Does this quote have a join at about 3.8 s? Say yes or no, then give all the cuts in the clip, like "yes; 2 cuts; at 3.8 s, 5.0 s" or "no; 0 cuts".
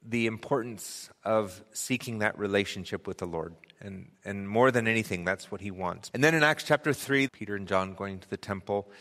no; 2 cuts; at 6.1 s, 7.3 s